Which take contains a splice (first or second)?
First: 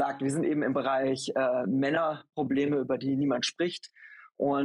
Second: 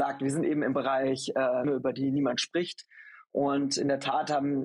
second